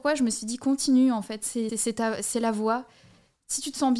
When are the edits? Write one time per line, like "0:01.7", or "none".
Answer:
0:01.7